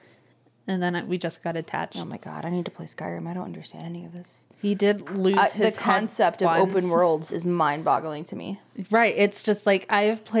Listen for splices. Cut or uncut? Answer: uncut